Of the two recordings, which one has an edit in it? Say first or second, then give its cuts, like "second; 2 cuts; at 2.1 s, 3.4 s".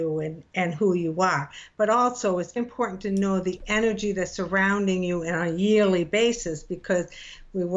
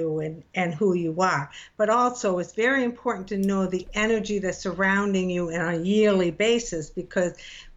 first; 1 cut; at 2.6 s